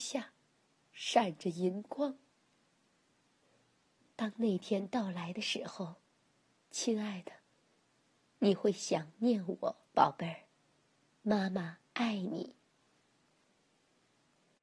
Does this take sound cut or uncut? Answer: cut